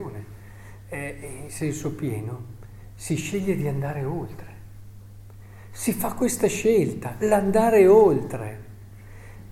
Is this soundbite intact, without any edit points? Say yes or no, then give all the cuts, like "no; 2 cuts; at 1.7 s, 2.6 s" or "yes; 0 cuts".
yes; 0 cuts